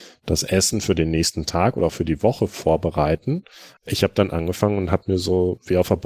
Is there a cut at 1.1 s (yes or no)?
no